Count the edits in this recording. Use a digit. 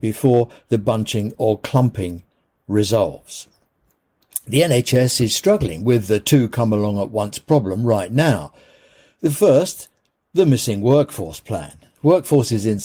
0